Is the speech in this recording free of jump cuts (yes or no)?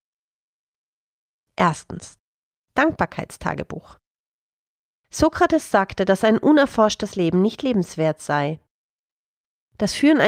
yes